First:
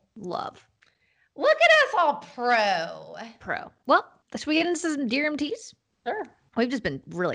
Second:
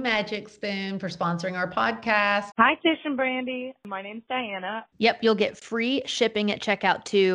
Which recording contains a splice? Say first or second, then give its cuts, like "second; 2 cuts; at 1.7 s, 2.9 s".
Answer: second; 2 cuts; at 2.5 s, 4.9 s